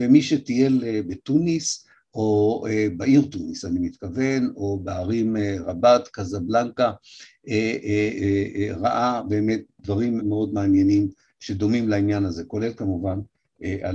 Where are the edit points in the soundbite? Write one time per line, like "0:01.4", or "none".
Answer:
0:10.2